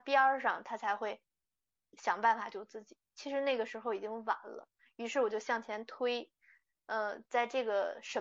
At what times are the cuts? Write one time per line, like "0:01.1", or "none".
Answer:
0:02.5